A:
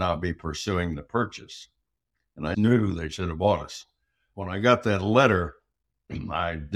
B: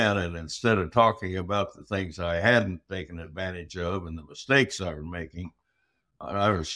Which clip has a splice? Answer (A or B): A